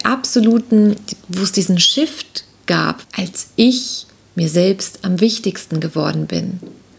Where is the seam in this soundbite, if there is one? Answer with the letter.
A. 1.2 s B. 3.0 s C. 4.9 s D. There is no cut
B